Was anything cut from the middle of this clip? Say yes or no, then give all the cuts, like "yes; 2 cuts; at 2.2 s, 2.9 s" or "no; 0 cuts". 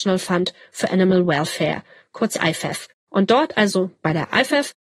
no; 0 cuts